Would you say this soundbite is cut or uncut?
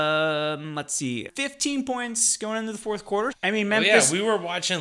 cut